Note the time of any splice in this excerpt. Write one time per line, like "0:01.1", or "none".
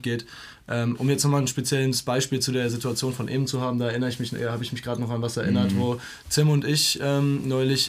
none